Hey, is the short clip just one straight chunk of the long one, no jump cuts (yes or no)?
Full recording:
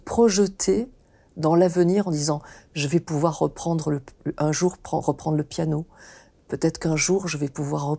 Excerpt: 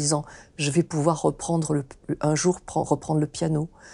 yes